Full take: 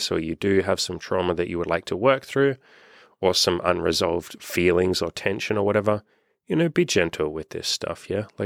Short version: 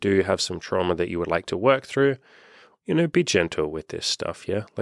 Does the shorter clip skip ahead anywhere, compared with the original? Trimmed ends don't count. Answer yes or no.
yes